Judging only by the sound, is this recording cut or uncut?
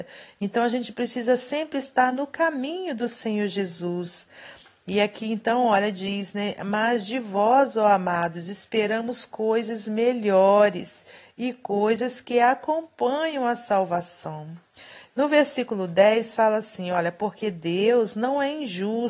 uncut